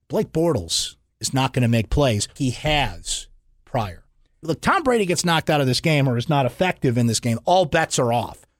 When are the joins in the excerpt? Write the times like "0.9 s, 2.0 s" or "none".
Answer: 2.4 s, 4.4 s